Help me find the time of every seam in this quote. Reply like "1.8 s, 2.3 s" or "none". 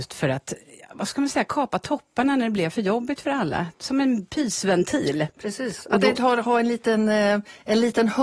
none